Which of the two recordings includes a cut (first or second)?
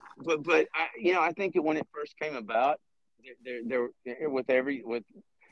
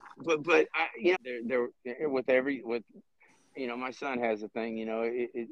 second